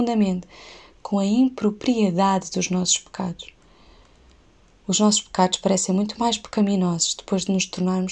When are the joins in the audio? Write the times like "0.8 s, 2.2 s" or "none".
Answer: none

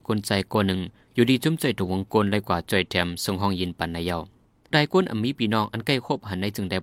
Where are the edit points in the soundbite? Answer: 4.7 s

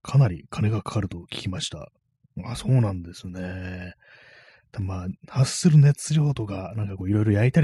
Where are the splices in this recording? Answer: none

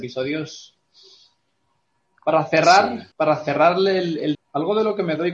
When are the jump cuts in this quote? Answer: 3.1 s, 4.3 s

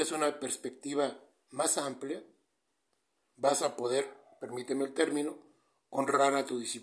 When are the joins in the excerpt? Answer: none

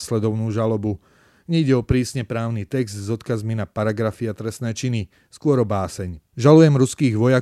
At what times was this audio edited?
6.3 s

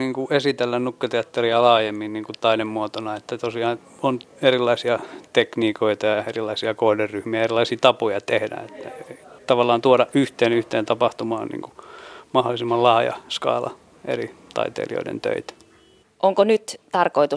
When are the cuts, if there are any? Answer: 16.0 s

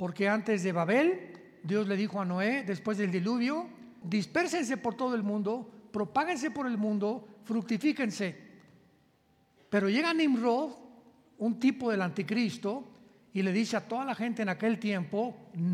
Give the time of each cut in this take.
4.0 s

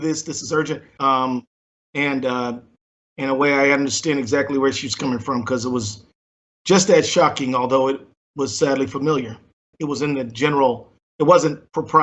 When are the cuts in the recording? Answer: 1.0 s, 9.7 s

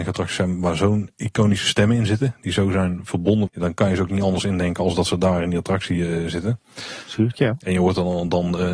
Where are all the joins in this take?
3.5 s, 7.0 s

